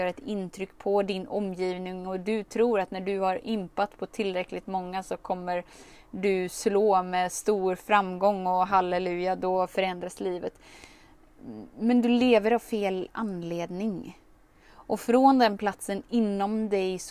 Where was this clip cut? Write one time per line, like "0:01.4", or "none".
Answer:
none